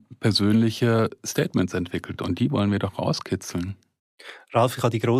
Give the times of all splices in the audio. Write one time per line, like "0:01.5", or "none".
none